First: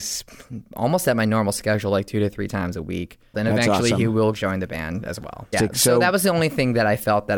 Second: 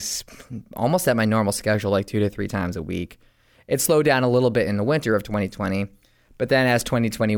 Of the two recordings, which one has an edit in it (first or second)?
first